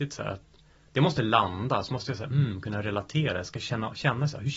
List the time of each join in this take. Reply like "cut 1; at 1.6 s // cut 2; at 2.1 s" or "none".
none